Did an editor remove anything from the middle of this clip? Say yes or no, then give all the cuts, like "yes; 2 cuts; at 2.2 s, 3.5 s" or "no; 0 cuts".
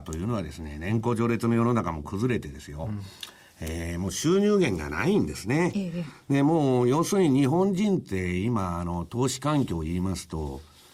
no; 0 cuts